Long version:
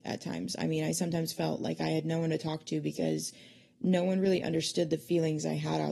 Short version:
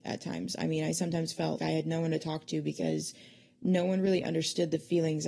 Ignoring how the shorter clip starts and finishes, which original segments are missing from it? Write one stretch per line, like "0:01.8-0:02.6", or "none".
0:01.6-0:01.8